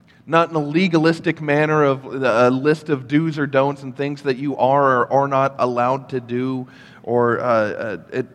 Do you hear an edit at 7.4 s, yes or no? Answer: no